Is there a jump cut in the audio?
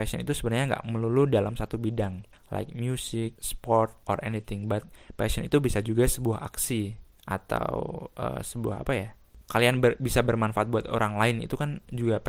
yes; 1 cut; at 9.4 s

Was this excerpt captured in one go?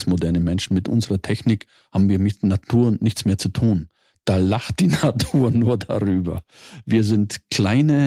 yes; 0 cuts

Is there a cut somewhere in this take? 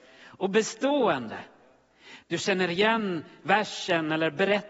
yes; 1 cut; at 2.2 s

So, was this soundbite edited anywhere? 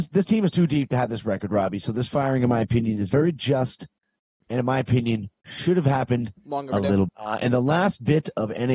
yes; 1 cut; at 7.1 s

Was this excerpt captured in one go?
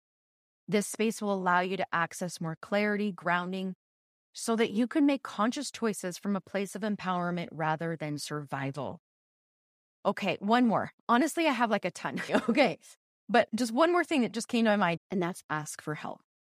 no; 2 cuts; at 12.3 s, 15.0 s

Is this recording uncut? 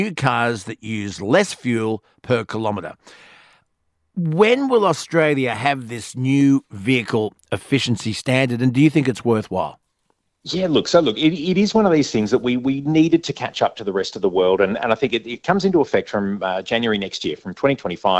yes; 0 cuts

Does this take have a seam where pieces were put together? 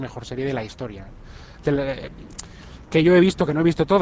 no; 0 cuts

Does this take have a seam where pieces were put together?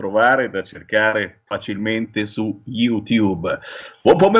no; 0 cuts

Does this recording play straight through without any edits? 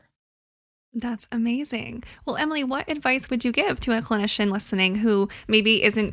yes; 0 cuts

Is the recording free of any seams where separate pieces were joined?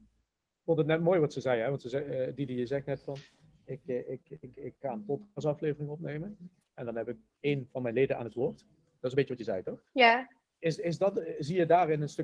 no; 1 cut; at 9.0 s

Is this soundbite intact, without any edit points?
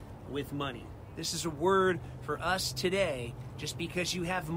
yes; 0 cuts

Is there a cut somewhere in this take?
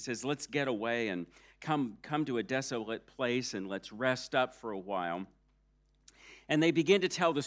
no; 0 cuts

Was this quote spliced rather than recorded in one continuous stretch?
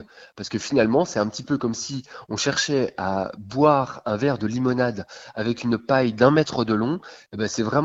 no; 0 cuts

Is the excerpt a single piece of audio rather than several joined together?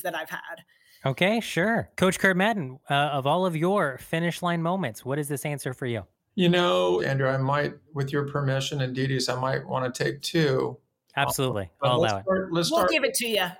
no; 2 cuts; at 1.9 s, 7.0 s

